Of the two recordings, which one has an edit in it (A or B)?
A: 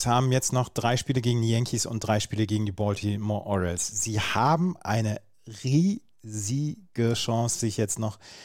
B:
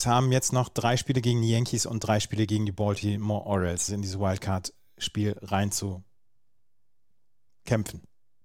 B